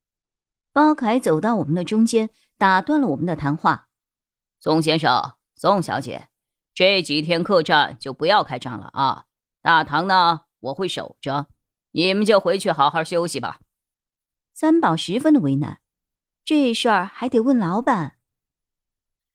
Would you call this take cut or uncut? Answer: uncut